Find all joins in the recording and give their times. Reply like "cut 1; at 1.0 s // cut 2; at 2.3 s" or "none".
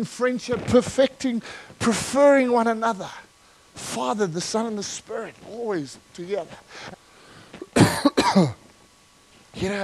cut 1; at 6.9 s